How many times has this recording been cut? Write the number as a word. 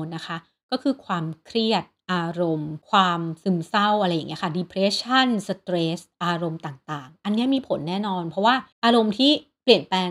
two